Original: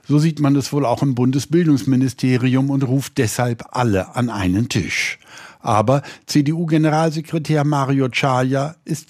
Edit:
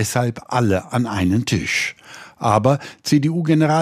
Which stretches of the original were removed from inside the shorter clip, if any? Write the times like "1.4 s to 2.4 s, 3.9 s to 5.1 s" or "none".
none